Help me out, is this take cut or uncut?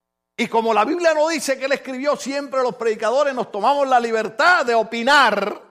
uncut